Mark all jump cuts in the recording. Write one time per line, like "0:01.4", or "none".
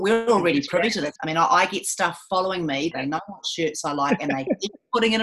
0:01.2
0:02.9